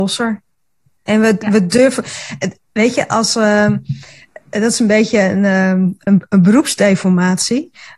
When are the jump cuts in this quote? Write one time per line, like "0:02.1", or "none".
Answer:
none